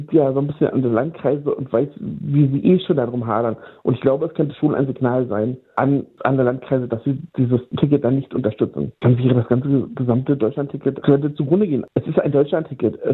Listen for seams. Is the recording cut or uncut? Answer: cut